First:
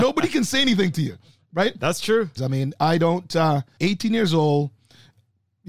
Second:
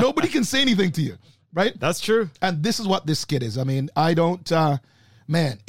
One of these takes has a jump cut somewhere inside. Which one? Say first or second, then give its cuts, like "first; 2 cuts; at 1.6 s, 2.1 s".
first; 2 cuts; at 2.4 s, 3.8 s